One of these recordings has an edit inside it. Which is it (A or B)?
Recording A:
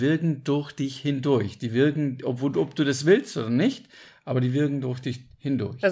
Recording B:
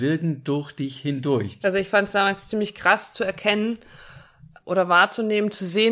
B